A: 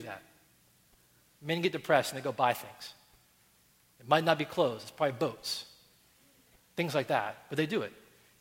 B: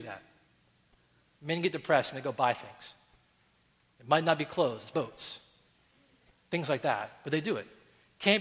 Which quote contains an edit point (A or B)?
B